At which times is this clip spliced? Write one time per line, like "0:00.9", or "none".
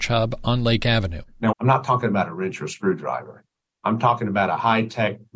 0:01.5